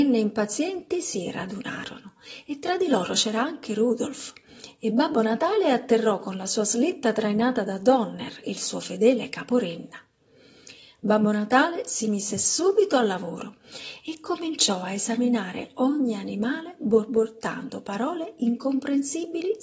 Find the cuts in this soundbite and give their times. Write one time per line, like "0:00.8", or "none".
none